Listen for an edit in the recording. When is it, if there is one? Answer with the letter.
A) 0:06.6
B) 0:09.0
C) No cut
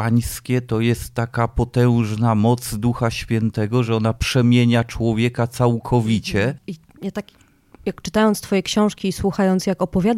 A